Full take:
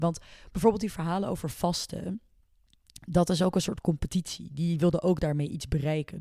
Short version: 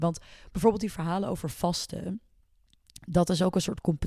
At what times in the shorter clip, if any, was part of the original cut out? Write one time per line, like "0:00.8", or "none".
none